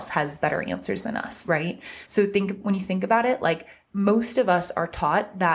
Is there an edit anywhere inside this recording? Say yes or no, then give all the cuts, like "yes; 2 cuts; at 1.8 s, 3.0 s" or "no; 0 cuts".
no; 0 cuts